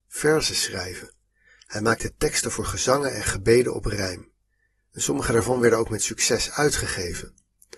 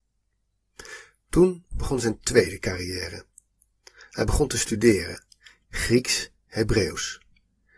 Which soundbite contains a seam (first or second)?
second